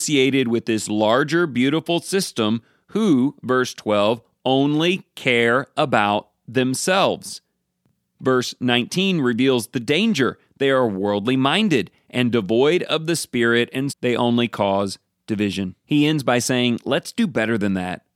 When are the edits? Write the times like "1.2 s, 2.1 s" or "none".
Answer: 13.9 s, 15.8 s